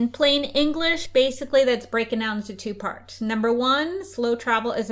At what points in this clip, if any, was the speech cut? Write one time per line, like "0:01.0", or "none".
none